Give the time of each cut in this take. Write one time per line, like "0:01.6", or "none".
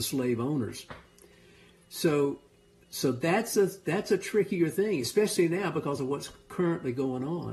none